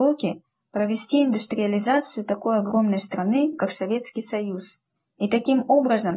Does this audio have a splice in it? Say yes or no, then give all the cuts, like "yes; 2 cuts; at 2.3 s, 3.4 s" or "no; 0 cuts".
no; 0 cuts